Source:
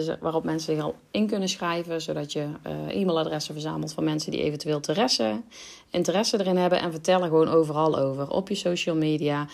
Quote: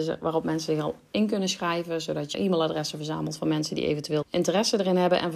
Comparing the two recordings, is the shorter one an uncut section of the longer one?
no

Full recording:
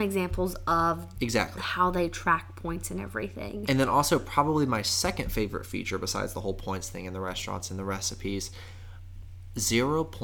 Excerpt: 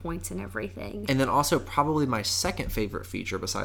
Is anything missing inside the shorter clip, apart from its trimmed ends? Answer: no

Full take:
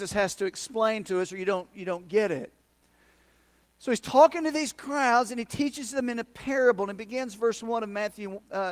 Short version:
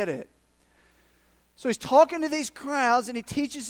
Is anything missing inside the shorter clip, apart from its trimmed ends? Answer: no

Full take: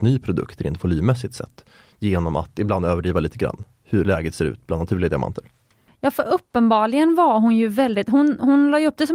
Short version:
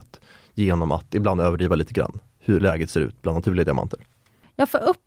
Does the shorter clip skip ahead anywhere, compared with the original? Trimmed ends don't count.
no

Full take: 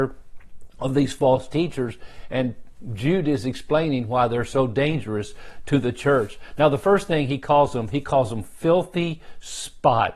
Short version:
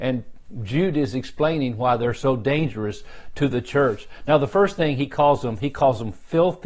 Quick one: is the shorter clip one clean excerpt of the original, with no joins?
yes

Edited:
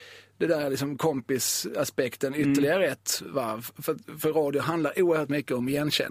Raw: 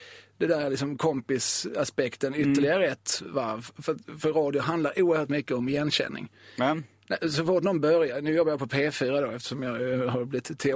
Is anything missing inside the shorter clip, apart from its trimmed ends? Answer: no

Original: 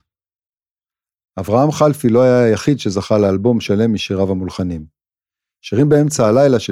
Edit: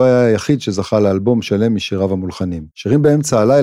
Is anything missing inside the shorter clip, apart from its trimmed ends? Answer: yes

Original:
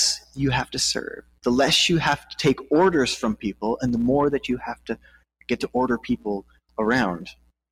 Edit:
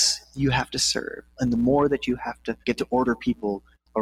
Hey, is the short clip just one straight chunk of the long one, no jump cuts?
no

